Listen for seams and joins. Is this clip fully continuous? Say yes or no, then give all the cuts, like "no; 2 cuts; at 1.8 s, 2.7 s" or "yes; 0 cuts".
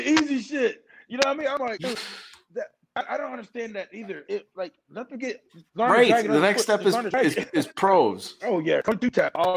no; 3 cuts; at 4.2 s, 5.7 s, 8.4 s